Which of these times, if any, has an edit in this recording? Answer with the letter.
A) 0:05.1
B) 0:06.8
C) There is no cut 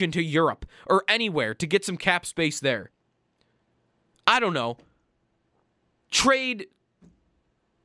C